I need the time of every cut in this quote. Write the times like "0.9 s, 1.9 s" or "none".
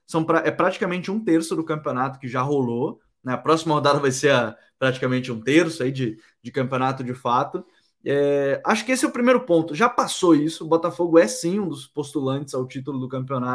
none

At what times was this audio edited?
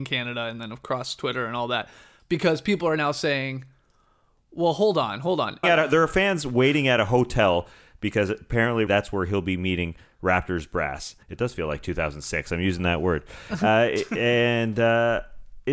5.6 s, 8.9 s, 11.2 s

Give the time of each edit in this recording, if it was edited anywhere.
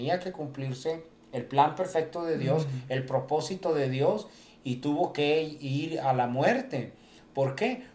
none

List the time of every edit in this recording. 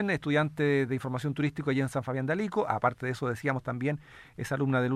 none

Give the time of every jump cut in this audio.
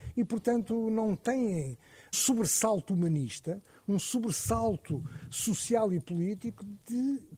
2.1 s

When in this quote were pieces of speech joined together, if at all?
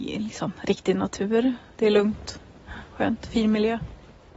1.7 s

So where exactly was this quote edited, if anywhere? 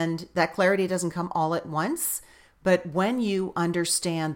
none

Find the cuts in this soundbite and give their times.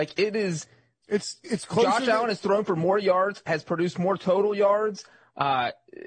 1.4 s

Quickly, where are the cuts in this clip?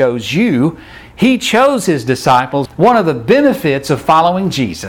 2.7 s

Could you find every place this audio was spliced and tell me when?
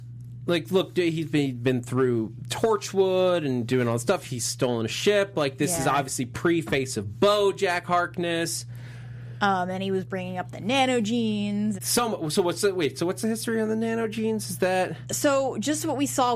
11.8 s, 15.0 s

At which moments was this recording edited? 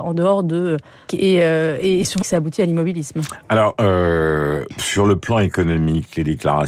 1.1 s, 2.2 s

